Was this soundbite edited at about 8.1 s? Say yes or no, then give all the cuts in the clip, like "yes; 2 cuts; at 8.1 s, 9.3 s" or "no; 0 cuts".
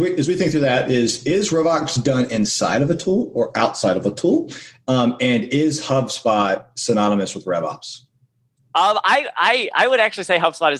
no; 0 cuts